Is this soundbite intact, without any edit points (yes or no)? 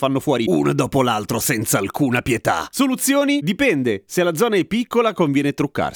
yes